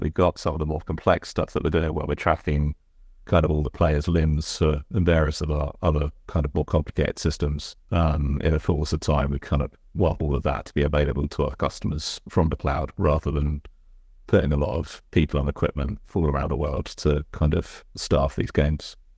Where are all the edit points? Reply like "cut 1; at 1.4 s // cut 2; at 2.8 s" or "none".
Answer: cut 1; at 4.9 s // cut 2; at 7.8 s